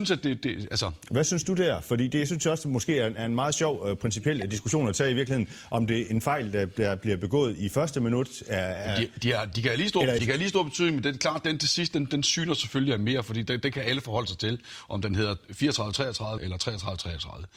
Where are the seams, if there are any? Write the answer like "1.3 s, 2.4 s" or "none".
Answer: 10.2 s, 16.4 s

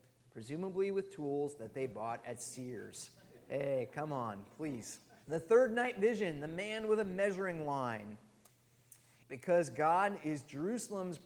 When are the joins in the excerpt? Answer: 5.2 s, 9.2 s

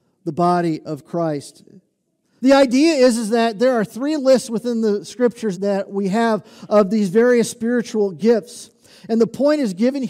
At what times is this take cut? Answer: 2.4 s, 5.5 s

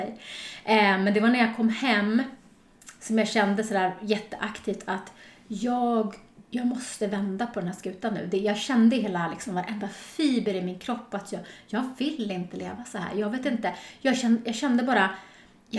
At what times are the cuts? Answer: 6.4 s

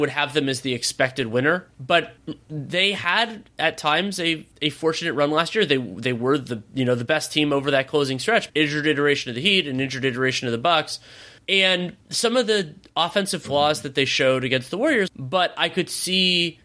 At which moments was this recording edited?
8.5 s, 15.1 s

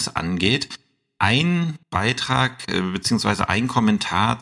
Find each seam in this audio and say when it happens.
1.8 s

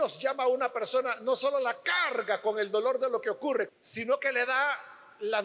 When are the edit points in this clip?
3.7 s

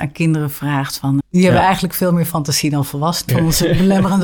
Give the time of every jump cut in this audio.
1.2 s, 3.3 s

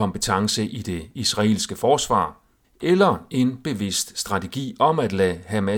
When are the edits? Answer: 2.6 s

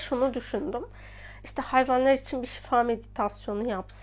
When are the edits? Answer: none

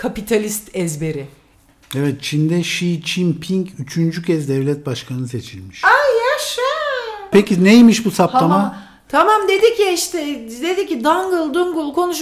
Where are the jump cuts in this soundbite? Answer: 7.3 s

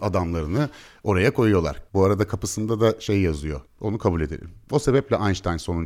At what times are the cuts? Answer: 1.9 s, 3.7 s

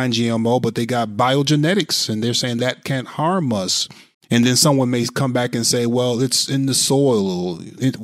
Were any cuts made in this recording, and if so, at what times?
4.1 s

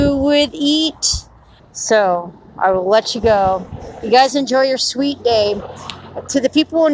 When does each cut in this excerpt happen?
1.6 s

